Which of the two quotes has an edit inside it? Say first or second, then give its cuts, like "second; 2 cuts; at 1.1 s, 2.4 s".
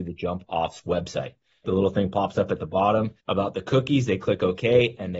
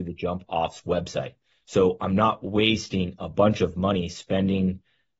first; 2 cuts; at 1.6 s, 3.2 s